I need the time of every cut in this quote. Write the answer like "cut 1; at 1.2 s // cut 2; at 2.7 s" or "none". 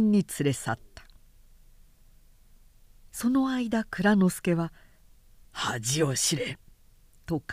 none